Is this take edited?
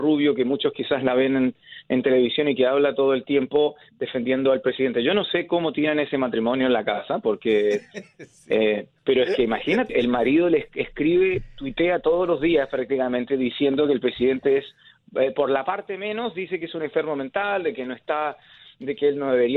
yes; 1 cut; at 9.9 s

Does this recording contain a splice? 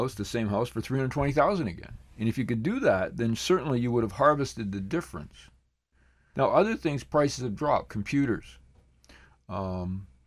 yes; 2 cuts; at 6.3 s, 7.9 s

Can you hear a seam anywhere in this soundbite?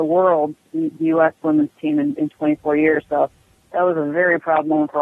no; 0 cuts

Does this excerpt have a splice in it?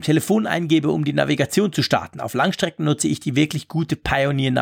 no; 0 cuts

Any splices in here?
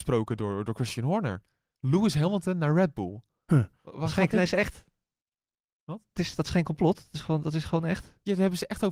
no; 0 cuts

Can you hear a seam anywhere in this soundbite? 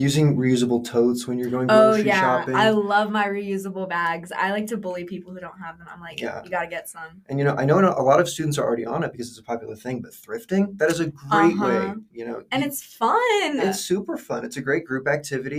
yes; 1 cut; at 13.6 s

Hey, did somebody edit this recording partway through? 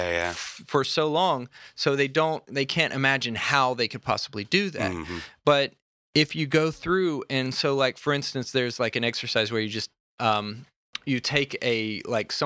no; 0 cuts

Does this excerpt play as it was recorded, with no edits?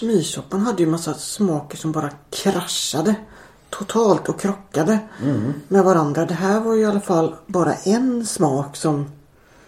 yes; 0 cuts

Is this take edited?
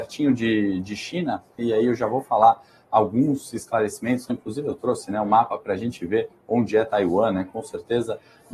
yes; 2 cuts; at 1.6 s, 4.3 s

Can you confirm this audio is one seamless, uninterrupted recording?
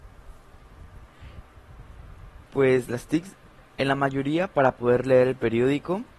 no; 2 cuts; at 2.4 s, 3.7 s

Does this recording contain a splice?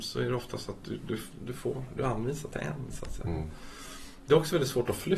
no; 0 cuts

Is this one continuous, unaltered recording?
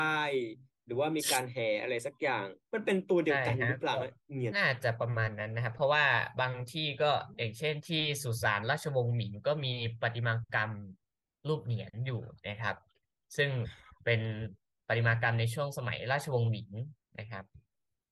no; 1 cut; at 4.5 s

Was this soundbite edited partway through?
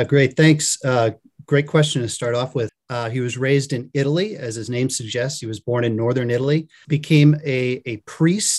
yes; 2 cuts; at 2.7 s, 6.8 s

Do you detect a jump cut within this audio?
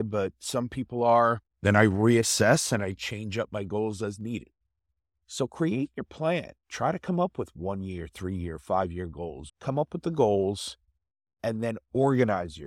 yes; 2 cuts; at 1.5 s, 9.5 s

